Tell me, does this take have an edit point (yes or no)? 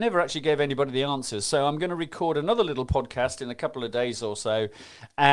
no